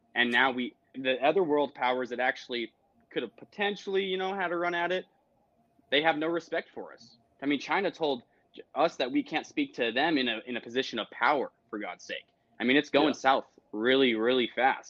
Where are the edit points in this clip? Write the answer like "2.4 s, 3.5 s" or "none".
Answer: 0.9 s